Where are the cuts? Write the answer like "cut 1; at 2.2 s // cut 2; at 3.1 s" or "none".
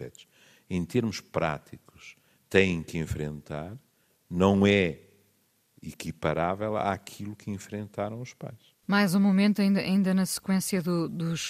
cut 1; at 8.8 s